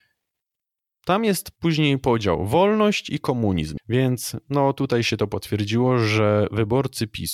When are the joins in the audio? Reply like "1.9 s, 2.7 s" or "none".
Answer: 3.8 s